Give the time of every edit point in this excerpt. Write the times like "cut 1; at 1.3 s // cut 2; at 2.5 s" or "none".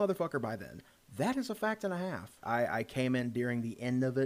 cut 1; at 2.4 s